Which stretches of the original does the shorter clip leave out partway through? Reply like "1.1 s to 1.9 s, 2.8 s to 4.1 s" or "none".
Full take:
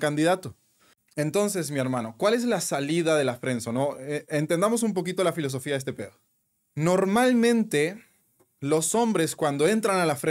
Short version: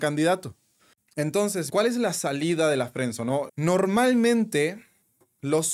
1.7 s to 2.2 s, 4.0 s to 6.7 s